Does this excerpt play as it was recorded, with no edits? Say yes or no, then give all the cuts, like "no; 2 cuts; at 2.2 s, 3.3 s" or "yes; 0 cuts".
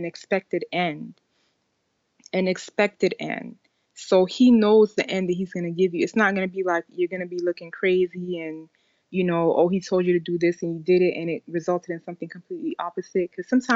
yes; 0 cuts